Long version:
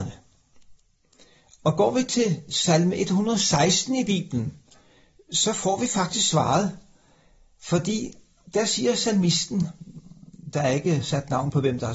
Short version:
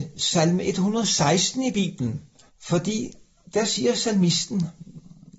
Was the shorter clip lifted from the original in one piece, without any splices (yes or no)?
no